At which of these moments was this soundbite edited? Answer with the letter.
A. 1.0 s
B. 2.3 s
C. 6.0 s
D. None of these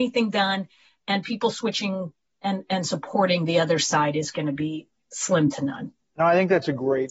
D